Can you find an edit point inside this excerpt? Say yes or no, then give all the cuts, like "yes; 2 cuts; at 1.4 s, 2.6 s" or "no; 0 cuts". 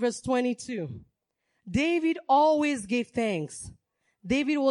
no; 0 cuts